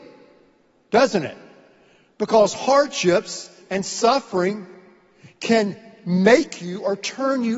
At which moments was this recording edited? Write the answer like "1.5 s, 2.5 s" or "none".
3.6 s